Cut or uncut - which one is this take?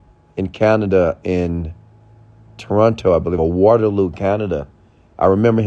uncut